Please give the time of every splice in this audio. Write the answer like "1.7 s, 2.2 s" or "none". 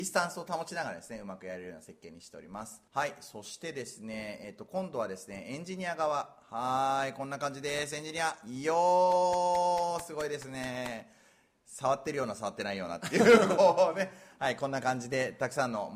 2.9 s